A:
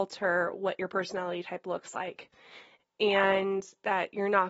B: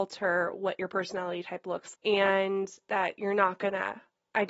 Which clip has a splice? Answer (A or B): B